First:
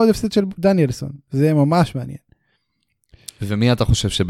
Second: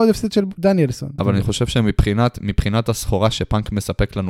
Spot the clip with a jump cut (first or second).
second